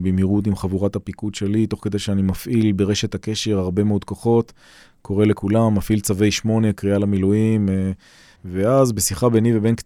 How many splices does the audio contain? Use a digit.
1